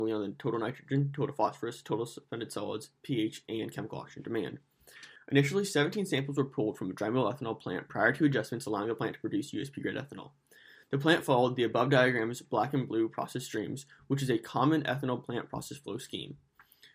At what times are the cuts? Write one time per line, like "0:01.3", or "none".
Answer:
0:05.2